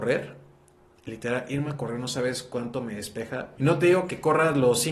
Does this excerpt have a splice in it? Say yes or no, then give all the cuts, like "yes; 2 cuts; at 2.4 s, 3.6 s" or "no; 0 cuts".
yes; 1 cut; at 3.6 s